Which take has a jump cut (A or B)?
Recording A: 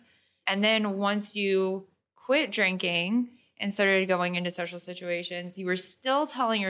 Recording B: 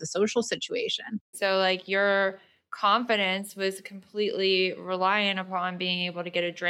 B